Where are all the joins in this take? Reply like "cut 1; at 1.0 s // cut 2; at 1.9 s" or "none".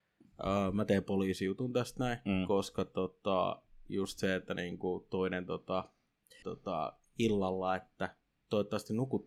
cut 1; at 6.4 s